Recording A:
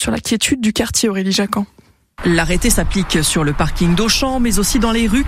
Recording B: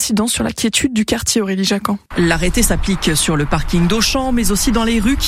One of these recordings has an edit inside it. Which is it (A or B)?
B